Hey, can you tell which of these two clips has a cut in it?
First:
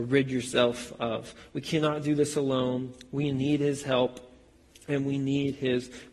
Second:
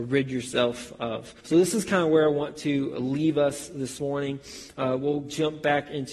second; 1 cut; at 1.4 s

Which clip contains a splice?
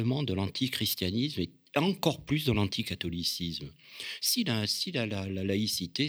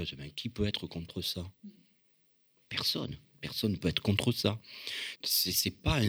second; 2 cuts; at 3.3 s, 5.2 s

